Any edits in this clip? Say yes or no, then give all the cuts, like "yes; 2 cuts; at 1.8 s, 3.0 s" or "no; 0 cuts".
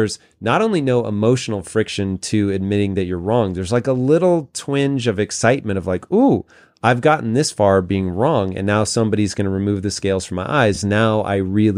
no; 0 cuts